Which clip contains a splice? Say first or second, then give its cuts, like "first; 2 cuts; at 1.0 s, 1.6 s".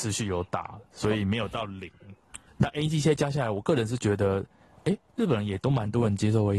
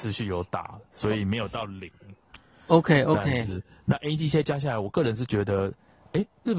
first; 1 cut; at 2.5 s